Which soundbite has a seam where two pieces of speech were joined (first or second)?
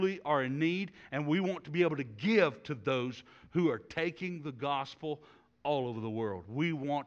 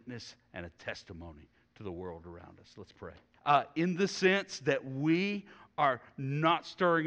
second